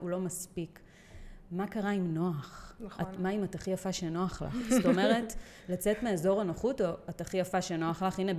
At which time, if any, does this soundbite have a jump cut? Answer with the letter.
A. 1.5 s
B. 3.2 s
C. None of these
B